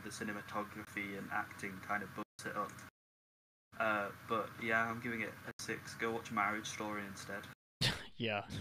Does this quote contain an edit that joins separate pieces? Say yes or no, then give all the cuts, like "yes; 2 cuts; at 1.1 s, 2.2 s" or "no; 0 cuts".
no; 0 cuts